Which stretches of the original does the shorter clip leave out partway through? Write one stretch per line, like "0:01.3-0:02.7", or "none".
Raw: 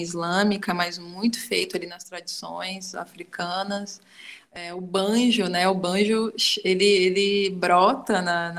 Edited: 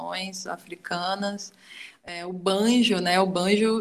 none